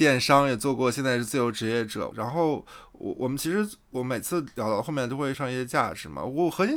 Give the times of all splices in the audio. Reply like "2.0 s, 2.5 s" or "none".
2.1 s, 5.3 s